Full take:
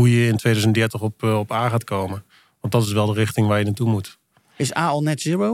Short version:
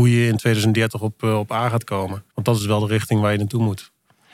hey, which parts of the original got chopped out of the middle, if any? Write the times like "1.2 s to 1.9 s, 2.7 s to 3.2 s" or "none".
2.3 s to 2.6 s